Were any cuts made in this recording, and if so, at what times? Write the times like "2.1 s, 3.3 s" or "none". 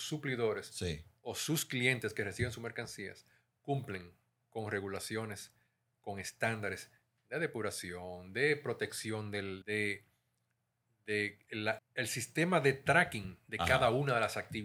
9.6 s, 11.8 s

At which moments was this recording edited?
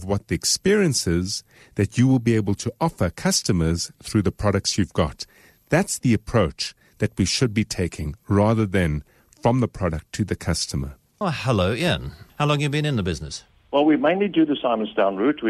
11.2 s, 12.3 s, 13.6 s

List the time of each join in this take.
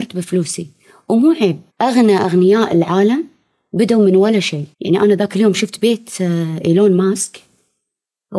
1.7 s, 4.7 s

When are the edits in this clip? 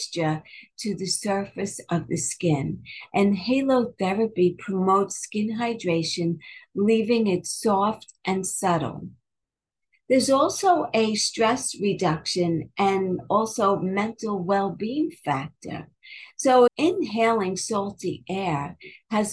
16.7 s

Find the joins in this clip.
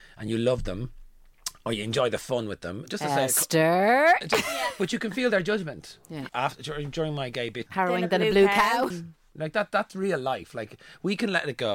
6.3 s, 7.7 s, 8.9 s

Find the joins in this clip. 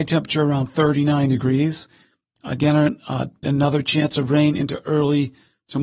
3.4 s

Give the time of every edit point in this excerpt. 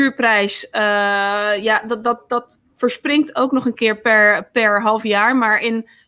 none

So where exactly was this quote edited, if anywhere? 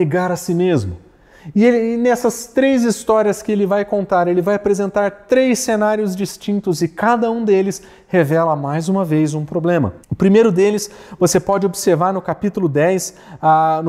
10.0 s

